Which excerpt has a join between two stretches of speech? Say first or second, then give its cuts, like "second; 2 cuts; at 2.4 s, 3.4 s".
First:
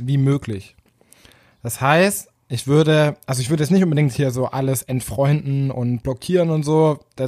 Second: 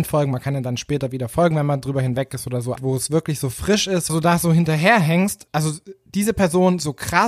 second; 3 cuts; at 2.8 s, 4.1 s, 5.5 s